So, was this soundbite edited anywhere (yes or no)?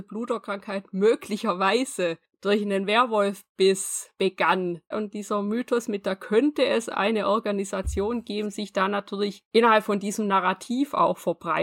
yes